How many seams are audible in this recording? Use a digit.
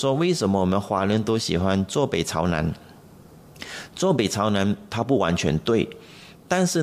0